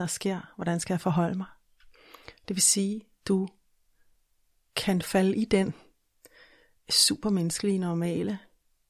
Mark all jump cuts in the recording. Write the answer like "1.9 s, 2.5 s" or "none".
none